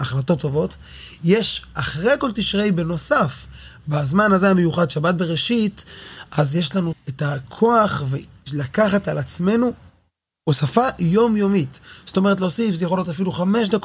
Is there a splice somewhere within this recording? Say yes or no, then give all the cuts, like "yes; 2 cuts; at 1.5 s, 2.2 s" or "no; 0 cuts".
yes; 1 cut; at 6.9 s